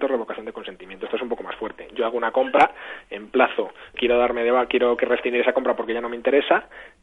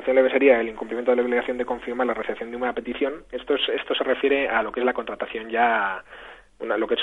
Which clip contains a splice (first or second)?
first